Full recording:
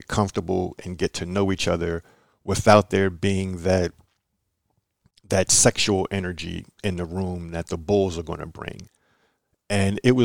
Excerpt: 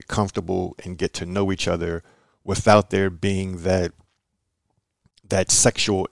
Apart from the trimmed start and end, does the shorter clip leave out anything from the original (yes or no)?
no